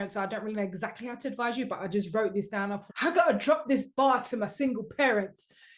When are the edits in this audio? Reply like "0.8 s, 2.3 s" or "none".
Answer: 2.9 s